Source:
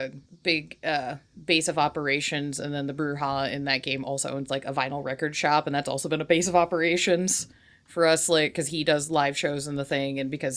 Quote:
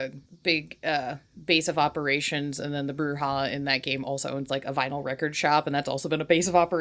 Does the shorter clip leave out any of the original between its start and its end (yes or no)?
no